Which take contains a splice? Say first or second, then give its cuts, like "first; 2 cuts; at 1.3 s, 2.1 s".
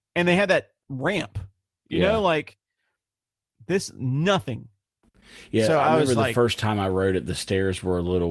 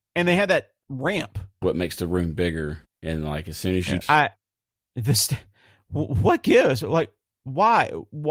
second; 2 cuts; at 1.6 s, 4.0 s